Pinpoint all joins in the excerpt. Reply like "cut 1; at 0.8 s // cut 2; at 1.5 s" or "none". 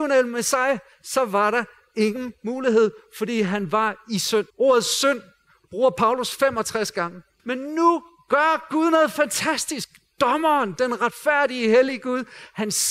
cut 1; at 4.5 s // cut 2; at 7.4 s